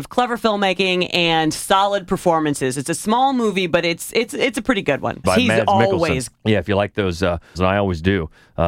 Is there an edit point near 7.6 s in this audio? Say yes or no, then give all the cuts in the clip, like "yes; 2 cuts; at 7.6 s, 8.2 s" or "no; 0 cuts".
yes; 3 cuts; at 5.2 s, 6.3 s, 7.6 s